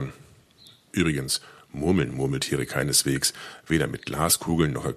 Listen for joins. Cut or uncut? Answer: uncut